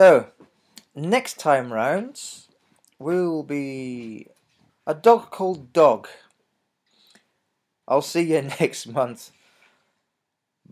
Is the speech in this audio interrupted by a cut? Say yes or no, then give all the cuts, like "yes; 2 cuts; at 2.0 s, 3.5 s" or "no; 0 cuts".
yes; 2 cuts; at 4.7 s, 7.8 s